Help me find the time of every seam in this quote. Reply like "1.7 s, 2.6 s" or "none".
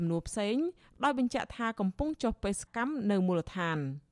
2.7 s